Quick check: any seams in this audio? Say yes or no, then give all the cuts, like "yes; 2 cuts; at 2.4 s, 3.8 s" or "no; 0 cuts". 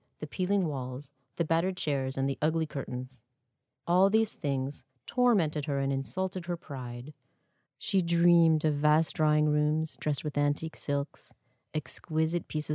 yes; 2 cuts; at 4.9 s, 7.7 s